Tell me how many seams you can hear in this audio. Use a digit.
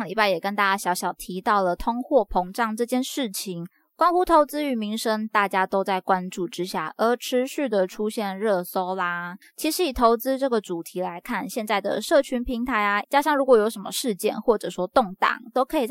2